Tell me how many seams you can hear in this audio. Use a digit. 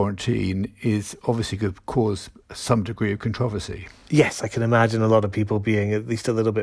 0